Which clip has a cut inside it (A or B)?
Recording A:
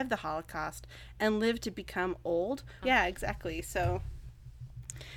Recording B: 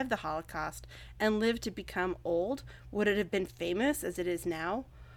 A